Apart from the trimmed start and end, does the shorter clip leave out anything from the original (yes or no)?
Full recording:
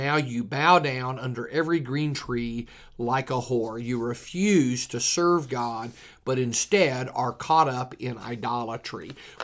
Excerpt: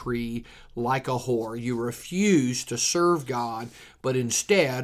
no